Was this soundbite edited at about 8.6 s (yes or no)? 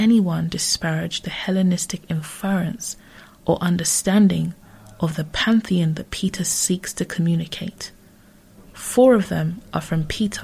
yes